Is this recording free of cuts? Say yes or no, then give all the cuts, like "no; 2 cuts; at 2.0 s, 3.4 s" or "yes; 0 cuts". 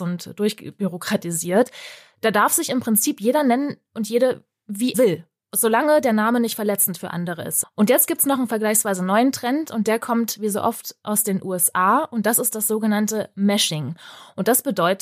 no; 2 cuts; at 4.9 s, 7.6 s